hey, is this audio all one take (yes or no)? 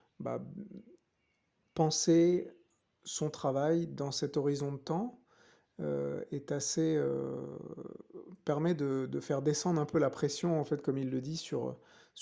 yes